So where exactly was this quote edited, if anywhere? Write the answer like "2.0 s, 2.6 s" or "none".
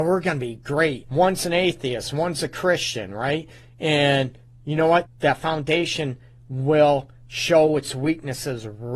1.0 s, 5.0 s